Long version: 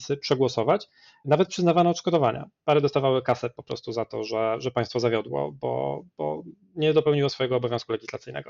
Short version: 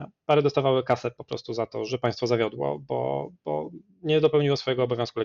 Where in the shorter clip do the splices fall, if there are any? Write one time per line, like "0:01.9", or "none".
0:01.9

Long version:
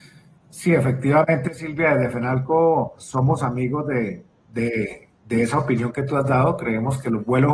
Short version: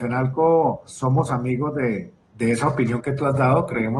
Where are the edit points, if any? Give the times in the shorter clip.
0:02.2

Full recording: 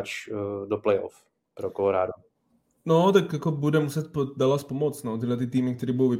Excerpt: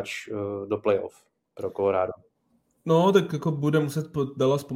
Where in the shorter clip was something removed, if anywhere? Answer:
none

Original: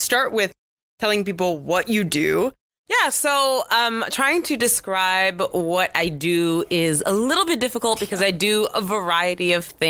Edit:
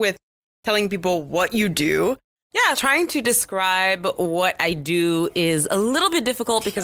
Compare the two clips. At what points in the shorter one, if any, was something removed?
0:02.7

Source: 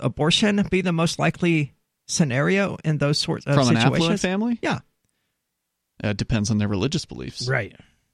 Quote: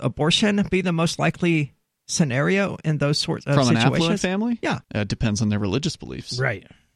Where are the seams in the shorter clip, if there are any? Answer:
0:04.8

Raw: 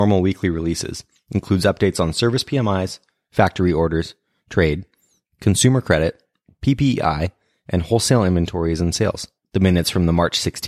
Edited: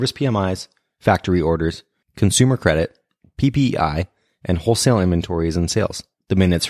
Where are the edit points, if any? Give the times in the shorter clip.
0:02.0

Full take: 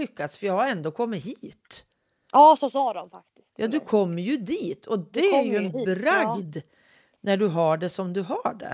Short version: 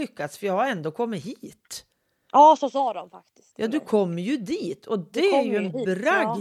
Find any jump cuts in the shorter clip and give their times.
none

